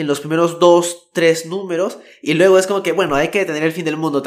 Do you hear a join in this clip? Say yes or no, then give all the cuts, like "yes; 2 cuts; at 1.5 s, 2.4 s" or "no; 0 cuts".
no; 0 cuts